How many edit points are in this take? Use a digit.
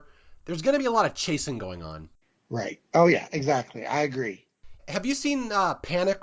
1